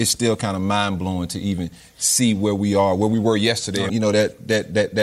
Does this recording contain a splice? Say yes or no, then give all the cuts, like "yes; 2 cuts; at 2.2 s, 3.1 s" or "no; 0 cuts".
yes; 1 cut; at 3.9 s